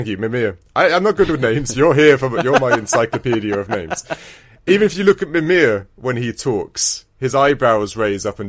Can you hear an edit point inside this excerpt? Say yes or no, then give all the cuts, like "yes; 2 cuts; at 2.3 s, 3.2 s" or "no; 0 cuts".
no; 0 cuts